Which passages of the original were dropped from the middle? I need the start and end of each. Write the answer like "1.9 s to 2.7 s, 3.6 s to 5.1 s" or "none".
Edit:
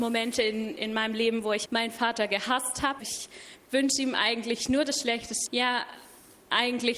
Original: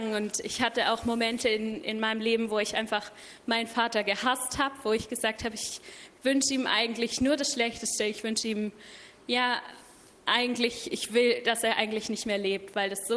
2.7 s to 3.4 s, 4.8 s to 5.5 s, 8.0 s to 9.2 s